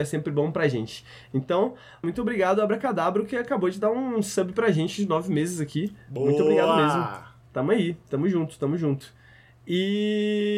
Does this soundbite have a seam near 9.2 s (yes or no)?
no